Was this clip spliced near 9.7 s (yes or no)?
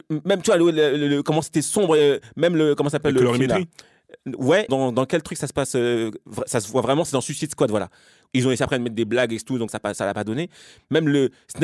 yes